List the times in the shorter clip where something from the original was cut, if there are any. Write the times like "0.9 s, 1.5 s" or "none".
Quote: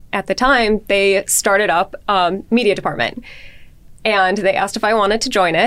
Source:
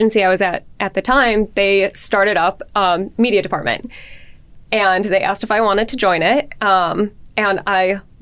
none